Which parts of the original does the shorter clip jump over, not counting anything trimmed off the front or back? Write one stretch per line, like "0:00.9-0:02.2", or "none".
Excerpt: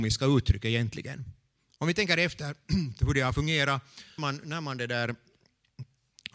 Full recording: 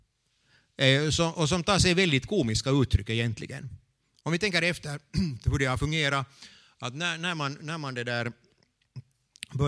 0:06.6-0:07.4

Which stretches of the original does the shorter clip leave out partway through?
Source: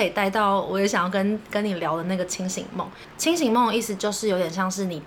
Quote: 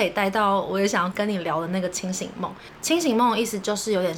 0:01.1-0:01.5

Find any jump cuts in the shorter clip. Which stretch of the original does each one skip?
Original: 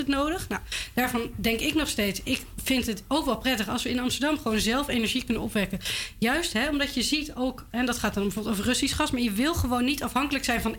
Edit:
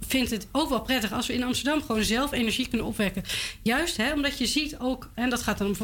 none

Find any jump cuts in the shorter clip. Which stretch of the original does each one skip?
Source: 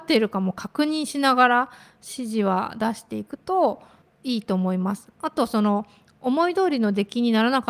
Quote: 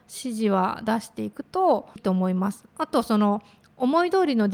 0:03.9-0:04.4

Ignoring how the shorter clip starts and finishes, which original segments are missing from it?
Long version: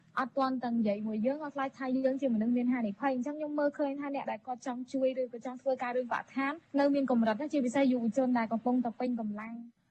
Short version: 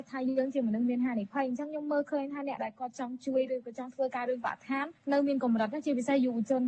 none

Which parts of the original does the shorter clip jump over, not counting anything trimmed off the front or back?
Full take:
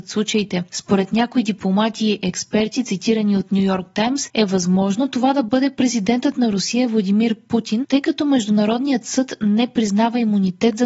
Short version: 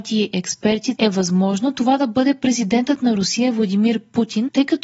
0:02.8-0:04.3

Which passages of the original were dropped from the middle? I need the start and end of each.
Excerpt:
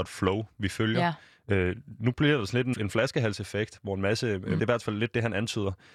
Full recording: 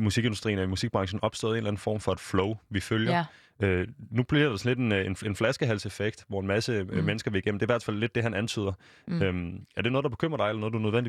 0:04.8-0:05.2
0:07.0-0:07.6

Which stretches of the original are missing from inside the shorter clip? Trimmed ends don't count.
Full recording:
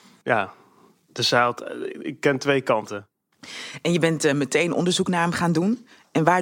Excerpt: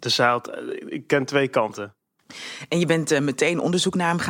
none

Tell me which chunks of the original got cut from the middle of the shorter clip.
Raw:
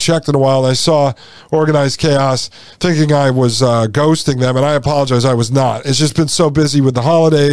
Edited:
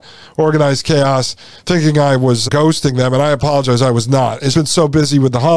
0:03.6-0:03.9
0:05.9-0:06.1

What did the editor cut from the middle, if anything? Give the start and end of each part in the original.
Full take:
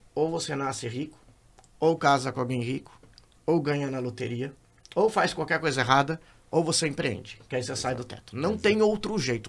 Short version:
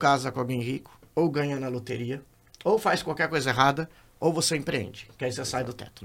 0:03.1-0:03.4

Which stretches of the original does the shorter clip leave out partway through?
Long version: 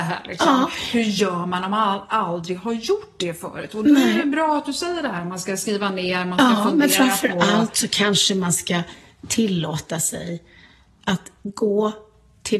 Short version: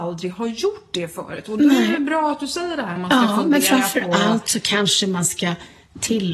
0:05.2-0:06.2

